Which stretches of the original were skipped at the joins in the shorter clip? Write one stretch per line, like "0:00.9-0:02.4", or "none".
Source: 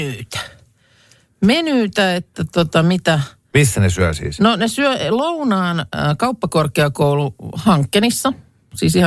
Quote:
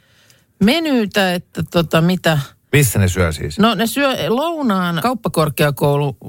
0:05.8-0:06.2